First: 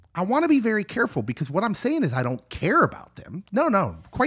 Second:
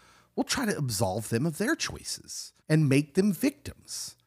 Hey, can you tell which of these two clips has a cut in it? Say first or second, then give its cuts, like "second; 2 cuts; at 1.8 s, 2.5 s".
second; 1 cut; at 2.6 s